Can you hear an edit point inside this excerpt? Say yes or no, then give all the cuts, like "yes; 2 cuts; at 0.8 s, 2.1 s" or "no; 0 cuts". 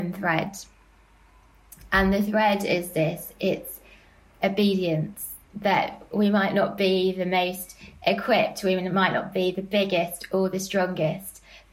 yes; 1 cut; at 5.4 s